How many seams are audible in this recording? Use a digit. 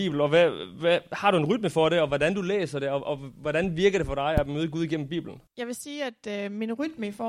1